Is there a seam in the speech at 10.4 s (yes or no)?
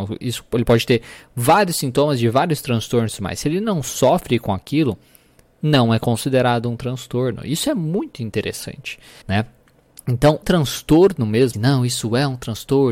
yes